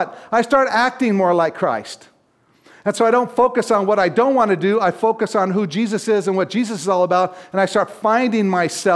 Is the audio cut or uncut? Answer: uncut